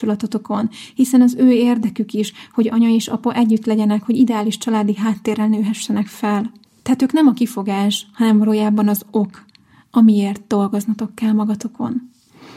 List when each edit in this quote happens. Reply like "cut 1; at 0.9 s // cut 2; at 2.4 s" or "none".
none